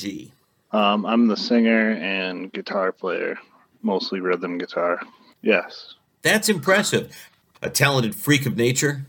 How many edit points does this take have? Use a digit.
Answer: 1